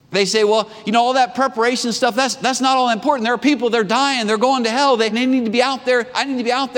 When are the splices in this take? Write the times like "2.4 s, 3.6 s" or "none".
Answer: 5.1 s